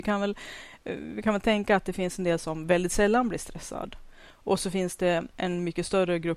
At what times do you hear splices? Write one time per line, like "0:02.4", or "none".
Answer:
none